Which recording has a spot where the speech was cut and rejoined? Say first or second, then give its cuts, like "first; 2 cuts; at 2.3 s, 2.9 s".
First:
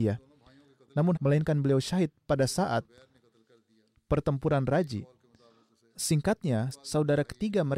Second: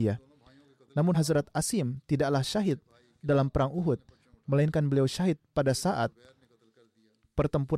first; 2 cuts; at 1.1 s, 6.7 s